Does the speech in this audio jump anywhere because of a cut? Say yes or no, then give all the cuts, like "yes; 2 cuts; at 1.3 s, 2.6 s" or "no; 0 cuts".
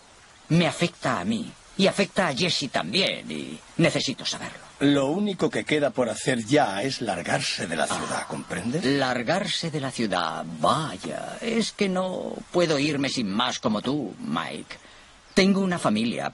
no; 0 cuts